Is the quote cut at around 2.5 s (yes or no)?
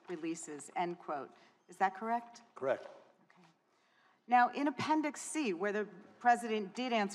no